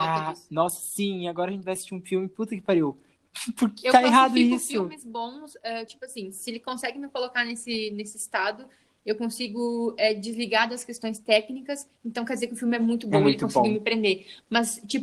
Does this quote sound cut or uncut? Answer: uncut